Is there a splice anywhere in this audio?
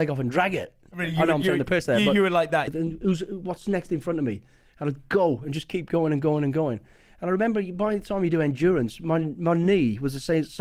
yes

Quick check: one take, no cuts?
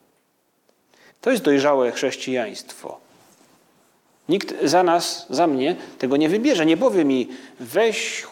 no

